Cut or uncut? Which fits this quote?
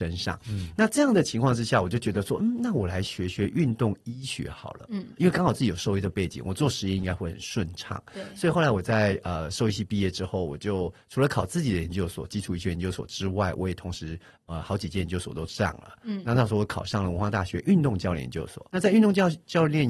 cut